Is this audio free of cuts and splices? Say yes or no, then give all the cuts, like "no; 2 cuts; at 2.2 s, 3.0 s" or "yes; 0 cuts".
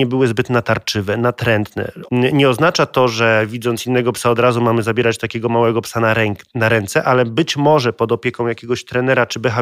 no; 1 cut; at 2.1 s